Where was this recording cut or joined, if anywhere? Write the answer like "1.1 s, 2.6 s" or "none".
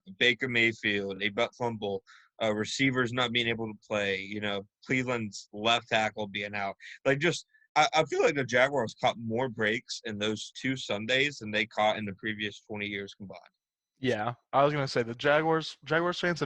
none